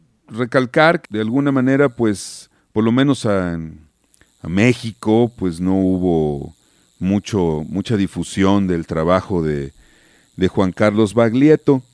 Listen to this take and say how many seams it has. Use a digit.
1